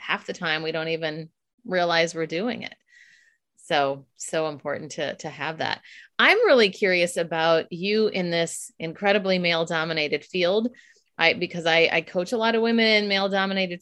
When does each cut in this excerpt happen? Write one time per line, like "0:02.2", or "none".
none